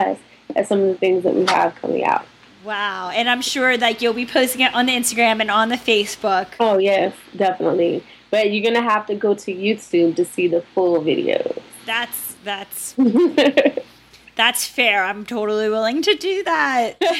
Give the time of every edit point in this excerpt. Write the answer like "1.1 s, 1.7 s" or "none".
none